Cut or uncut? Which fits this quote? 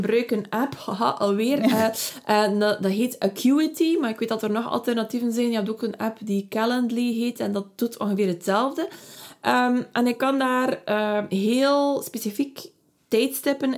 uncut